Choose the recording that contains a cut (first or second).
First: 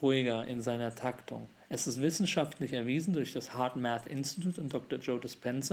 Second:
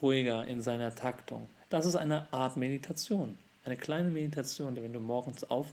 second